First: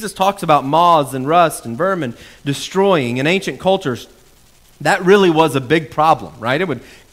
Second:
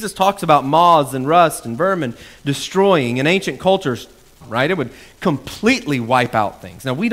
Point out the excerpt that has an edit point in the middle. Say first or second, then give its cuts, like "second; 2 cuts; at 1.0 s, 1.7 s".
second; 1 cut; at 4.4 s